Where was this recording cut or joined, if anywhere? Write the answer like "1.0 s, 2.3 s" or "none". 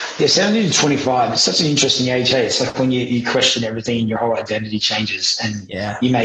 none